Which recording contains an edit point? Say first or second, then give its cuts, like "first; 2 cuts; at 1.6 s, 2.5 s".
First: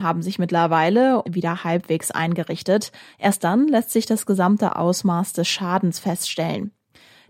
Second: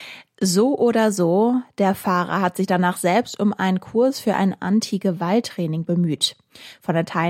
first; 2 cuts; at 1.2 s, 3.1 s